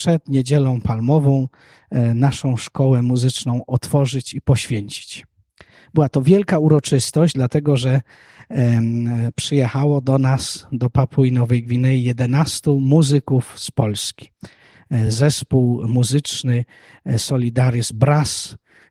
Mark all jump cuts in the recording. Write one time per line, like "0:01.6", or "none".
none